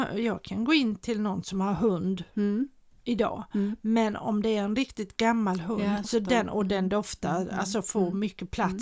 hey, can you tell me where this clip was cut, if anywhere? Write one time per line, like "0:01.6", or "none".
0:06.0